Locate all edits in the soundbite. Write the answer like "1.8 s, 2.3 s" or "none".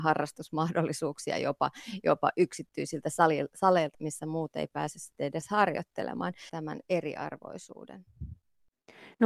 3.9 s, 6.5 s